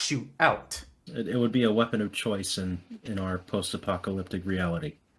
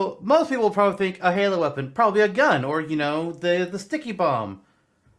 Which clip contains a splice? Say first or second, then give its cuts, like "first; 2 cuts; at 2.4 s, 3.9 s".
first; 1 cut; at 1.1 s